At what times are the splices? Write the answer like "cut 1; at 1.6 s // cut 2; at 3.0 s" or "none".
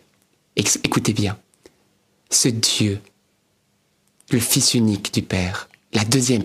none